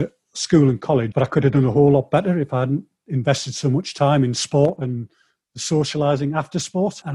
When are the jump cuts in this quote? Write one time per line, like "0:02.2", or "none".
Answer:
0:01.1